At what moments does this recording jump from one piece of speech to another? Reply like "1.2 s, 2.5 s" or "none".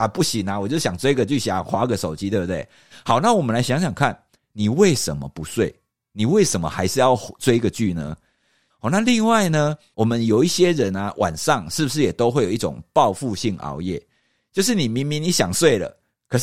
8.7 s, 9.9 s